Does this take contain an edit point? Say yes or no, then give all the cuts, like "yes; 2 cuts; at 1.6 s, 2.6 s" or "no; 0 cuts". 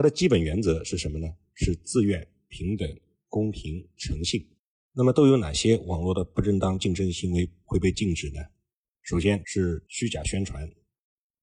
no; 0 cuts